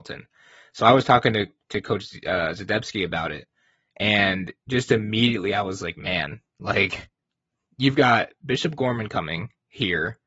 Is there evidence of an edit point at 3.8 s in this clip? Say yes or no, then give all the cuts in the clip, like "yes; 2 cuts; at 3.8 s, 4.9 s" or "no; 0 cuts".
no; 0 cuts